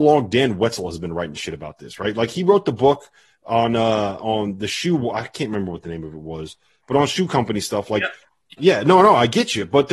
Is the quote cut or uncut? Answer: cut